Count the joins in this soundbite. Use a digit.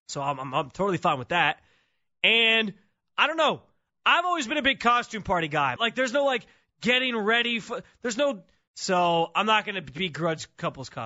2